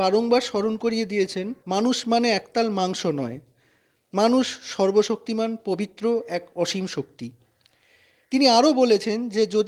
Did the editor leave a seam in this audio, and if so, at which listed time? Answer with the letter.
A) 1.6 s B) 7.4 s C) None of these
A